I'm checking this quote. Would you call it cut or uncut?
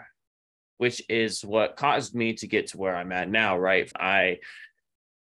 cut